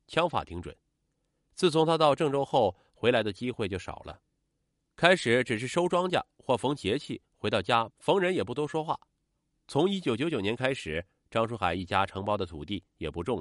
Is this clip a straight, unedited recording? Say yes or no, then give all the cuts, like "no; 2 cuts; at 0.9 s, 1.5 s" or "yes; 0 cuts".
no; 1 cut; at 7.9 s